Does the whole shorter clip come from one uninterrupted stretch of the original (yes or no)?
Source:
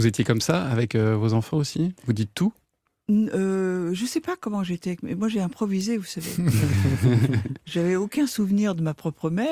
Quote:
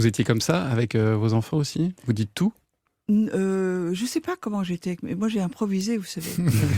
yes